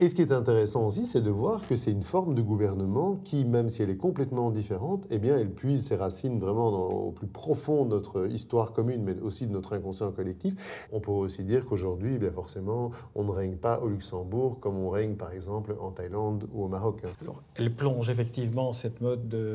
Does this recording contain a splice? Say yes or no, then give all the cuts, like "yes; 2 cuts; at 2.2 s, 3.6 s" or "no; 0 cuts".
yes; 2 cuts; at 10.9 s, 17.1 s